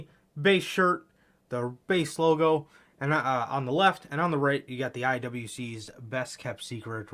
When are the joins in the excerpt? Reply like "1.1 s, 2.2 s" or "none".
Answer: none